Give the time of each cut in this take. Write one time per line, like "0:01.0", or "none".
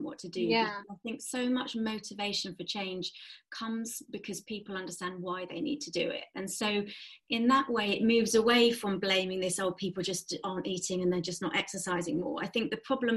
none